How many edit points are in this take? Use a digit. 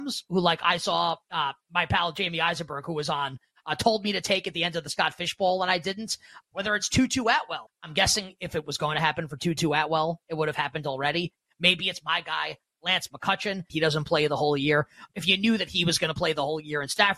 3